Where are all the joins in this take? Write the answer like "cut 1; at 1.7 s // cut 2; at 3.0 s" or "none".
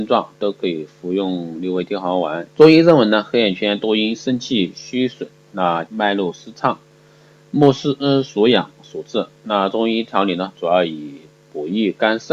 cut 1; at 2.5 s // cut 2; at 5.9 s